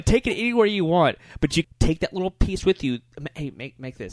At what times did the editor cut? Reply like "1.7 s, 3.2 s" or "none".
1.6 s